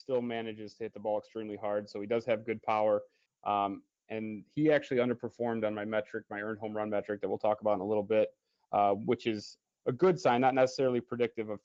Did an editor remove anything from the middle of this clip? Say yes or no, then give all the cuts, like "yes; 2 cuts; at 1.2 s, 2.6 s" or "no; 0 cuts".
yes; 1 cut; at 3.3 s